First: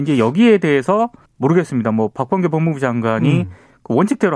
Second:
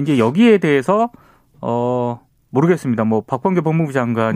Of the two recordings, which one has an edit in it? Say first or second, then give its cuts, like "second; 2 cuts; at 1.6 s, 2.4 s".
first; 1 cut; at 1.3 s